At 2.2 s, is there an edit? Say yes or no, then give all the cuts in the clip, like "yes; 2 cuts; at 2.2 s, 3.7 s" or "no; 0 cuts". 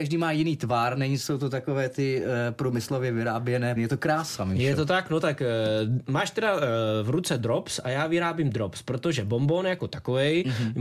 no; 1 cut; at 3.8 s